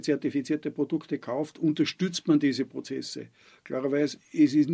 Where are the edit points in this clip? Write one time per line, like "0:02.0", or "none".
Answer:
none